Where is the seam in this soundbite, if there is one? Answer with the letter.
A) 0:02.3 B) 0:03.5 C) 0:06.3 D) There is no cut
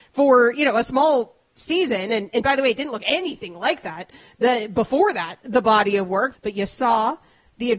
C